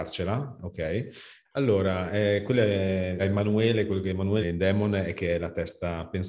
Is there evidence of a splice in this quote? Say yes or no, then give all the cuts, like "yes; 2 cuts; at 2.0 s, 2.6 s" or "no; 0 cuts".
yes; 3 cuts; at 1.4 s, 3.2 s, 4.4 s